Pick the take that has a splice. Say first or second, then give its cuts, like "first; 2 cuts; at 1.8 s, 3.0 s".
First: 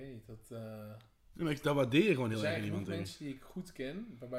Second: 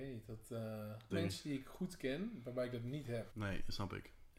second; 2 cuts; at 1.1 s, 3.3 s